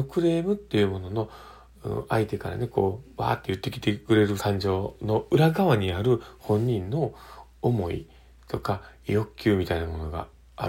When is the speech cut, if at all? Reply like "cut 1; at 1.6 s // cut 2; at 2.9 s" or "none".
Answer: cut 1; at 4.4 s